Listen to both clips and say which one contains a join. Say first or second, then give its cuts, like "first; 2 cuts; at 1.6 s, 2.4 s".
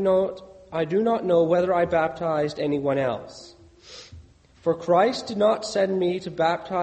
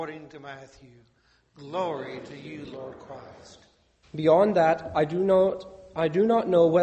second; 1 cut; at 4.0 s